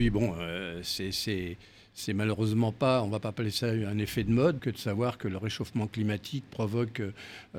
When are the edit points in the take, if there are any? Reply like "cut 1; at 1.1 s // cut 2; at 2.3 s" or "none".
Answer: cut 1; at 4.6 s // cut 2; at 6.5 s